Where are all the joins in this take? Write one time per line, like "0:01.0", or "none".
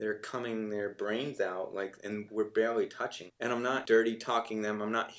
0:03.3